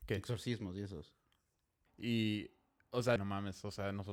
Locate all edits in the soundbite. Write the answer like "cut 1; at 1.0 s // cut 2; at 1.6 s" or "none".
cut 1; at 1.9 s // cut 2; at 3.2 s

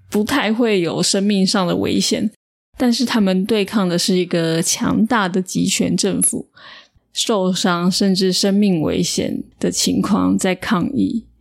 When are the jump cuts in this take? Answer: cut 1; at 7.0 s // cut 2; at 9.5 s

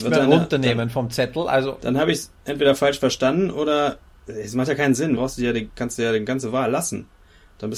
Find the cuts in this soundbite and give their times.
cut 1; at 2.4 s // cut 2; at 5.2 s

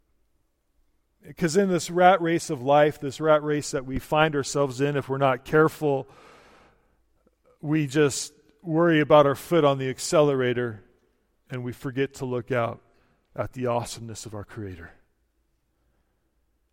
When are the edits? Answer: cut 1; at 1.2 s

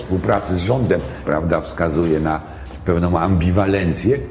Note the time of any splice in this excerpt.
cut 1; at 1.2 s

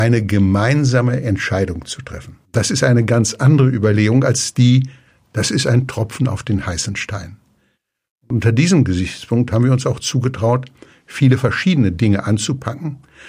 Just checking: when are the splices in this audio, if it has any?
cut 1; at 2.4 s

